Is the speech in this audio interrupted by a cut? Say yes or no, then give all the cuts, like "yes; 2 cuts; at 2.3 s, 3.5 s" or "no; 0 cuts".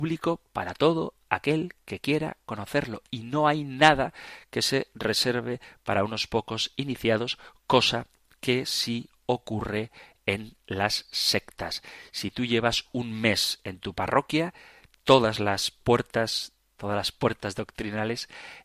yes; 1 cut; at 16.8 s